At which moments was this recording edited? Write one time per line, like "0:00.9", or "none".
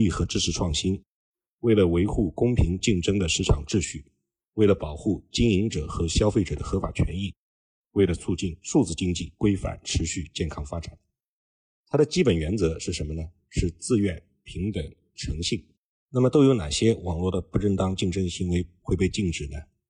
0:15.1